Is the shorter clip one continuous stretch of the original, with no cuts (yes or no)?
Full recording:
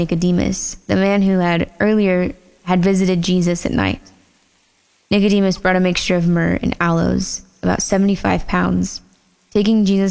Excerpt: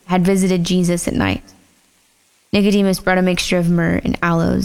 yes